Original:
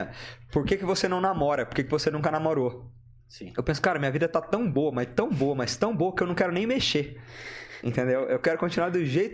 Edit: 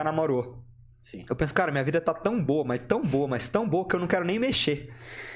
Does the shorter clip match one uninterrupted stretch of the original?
yes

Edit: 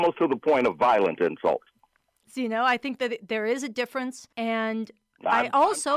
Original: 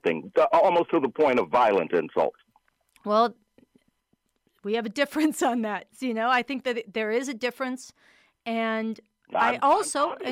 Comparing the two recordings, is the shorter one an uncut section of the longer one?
no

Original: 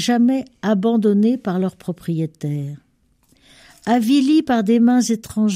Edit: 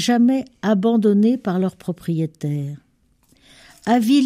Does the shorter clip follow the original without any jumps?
yes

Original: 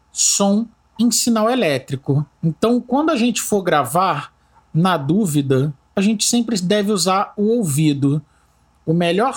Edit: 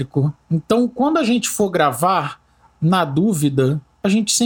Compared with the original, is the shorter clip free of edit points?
yes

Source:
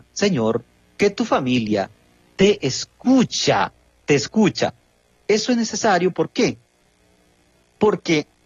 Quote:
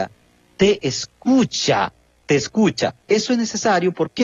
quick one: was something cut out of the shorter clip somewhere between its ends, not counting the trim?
yes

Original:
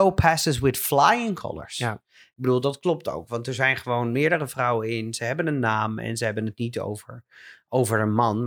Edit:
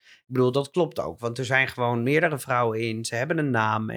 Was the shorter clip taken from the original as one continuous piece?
yes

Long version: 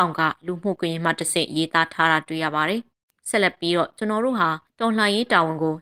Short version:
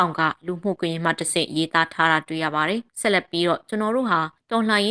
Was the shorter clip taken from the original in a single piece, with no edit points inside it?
no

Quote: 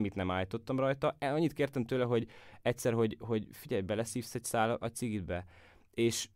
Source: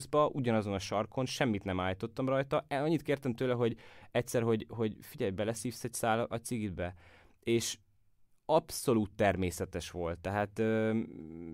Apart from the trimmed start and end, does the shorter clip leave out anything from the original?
no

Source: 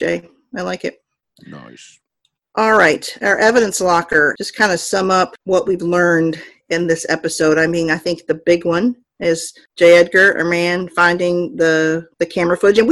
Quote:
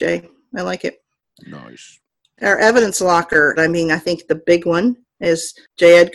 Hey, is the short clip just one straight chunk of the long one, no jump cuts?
no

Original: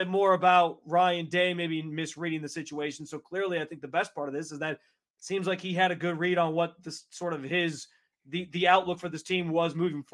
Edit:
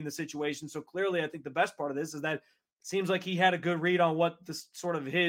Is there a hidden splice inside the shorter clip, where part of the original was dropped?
no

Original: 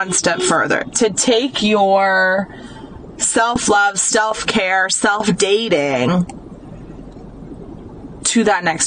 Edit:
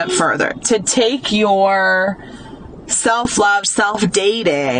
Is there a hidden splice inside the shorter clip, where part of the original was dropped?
yes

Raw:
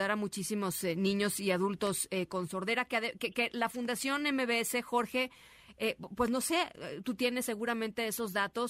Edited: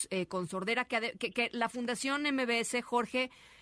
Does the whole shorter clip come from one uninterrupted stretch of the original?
yes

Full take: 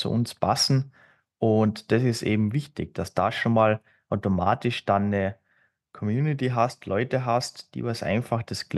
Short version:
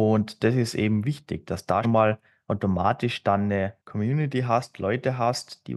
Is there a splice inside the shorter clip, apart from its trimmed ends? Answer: yes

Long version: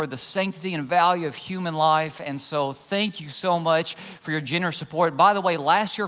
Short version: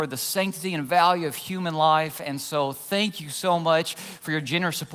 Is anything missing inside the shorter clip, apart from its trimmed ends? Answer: no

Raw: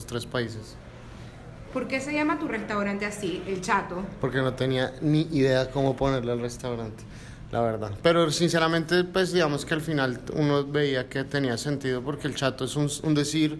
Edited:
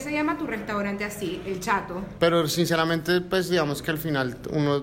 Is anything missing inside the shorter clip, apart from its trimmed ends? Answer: yes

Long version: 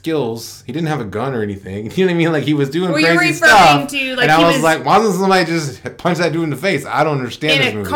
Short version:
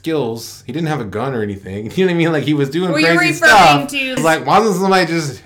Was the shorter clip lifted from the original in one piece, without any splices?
no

